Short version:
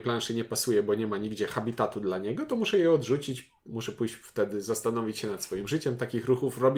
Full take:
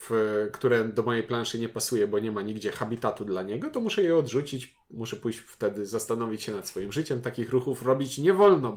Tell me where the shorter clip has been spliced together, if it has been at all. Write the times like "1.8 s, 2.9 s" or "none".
none

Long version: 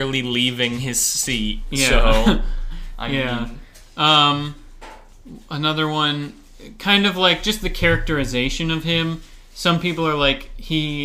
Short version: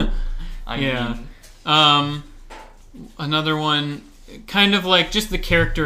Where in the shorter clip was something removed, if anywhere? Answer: none

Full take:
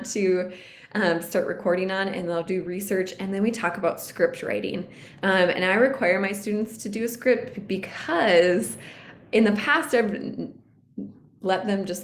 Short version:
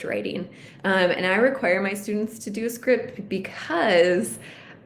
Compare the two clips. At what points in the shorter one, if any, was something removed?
none

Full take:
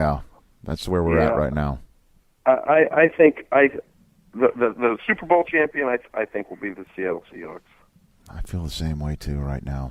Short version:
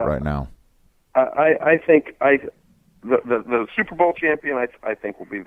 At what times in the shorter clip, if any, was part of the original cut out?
none

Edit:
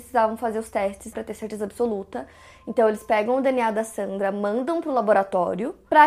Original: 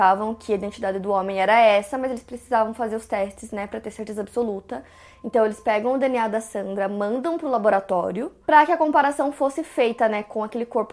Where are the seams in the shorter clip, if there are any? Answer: 1.1 s

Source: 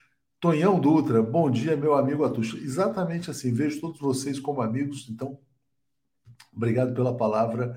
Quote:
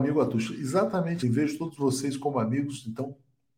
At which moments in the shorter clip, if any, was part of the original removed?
1.2 s

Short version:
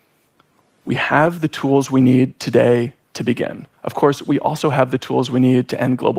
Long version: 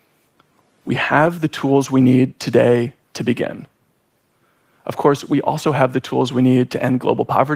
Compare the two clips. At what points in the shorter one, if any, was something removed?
3.7 s

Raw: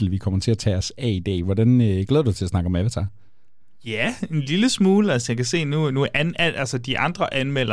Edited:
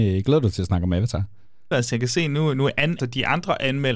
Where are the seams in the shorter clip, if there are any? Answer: 1.7 s, 3.0 s

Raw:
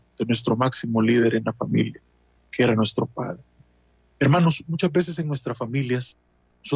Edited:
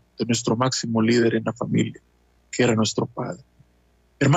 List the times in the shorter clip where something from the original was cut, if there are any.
none

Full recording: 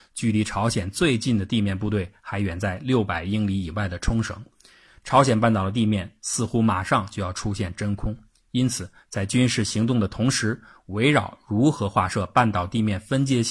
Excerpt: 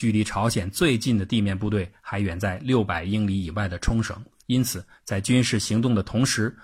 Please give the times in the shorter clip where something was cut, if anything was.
4.4 s

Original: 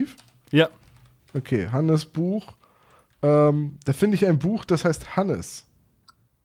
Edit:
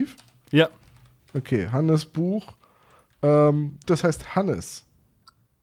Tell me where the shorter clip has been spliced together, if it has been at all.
3.8 s

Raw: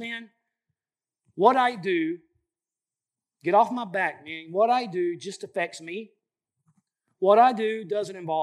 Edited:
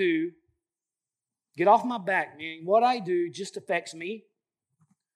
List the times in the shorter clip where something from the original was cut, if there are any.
none

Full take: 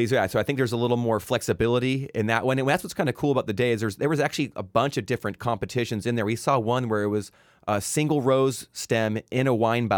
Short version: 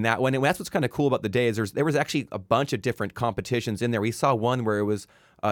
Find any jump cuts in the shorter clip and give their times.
none

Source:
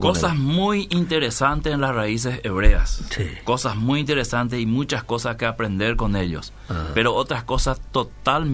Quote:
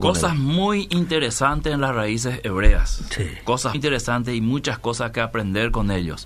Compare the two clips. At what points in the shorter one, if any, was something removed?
3.7 s

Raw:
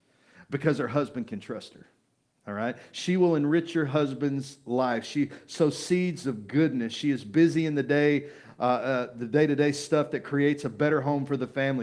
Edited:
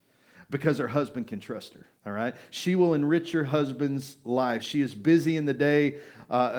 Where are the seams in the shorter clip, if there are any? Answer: 1.9 s, 4.6 s

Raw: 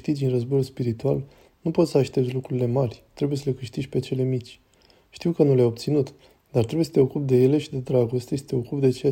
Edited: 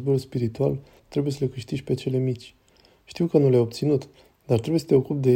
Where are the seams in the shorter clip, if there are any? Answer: 1.0 s

